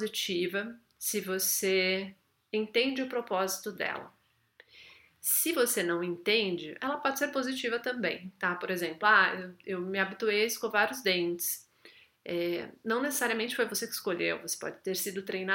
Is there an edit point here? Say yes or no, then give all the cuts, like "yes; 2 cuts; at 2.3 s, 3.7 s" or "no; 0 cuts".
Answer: no; 0 cuts